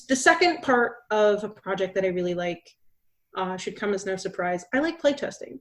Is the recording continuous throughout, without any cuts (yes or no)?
yes